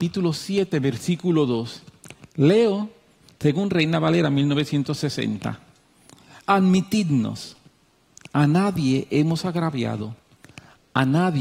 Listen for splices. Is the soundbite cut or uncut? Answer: uncut